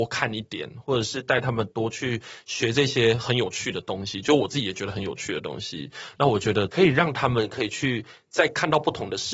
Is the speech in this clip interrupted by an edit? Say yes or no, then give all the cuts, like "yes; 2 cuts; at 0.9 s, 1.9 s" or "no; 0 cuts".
no; 0 cuts